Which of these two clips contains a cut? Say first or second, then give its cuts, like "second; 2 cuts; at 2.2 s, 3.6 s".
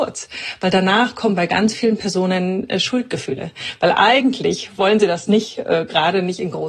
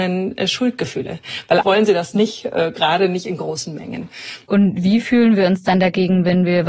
second; 2 cuts; at 1.6 s, 4.5 s